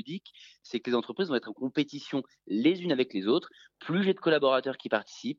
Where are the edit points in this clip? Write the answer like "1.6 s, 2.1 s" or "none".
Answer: none